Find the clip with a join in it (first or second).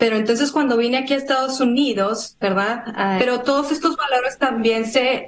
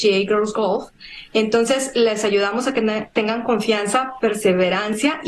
first